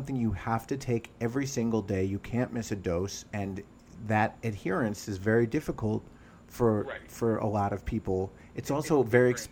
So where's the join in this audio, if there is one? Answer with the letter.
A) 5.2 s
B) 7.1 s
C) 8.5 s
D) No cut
D